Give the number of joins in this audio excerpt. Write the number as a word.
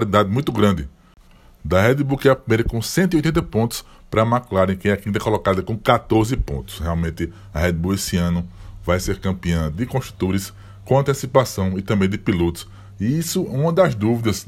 zero